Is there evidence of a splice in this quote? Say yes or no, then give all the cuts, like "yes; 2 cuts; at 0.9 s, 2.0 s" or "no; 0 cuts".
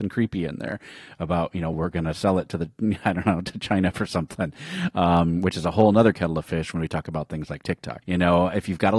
yes; 2 cuts; at 1.7 s, 8.0 s